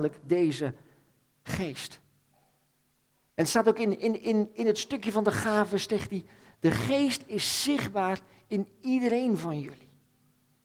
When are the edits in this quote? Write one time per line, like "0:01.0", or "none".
none